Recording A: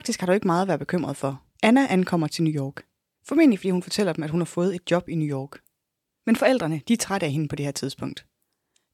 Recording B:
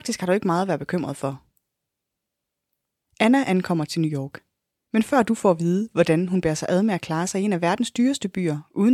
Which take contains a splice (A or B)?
A